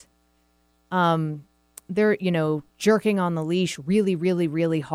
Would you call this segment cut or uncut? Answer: cut